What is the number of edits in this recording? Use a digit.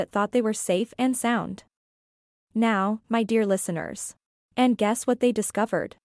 2